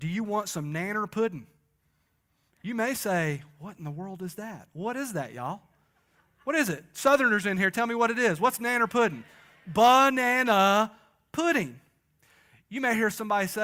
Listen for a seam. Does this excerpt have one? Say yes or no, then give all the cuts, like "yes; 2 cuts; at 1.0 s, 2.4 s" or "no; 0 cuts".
no; 0 cuts